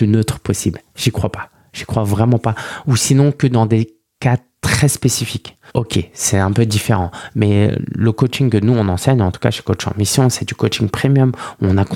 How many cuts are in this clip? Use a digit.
1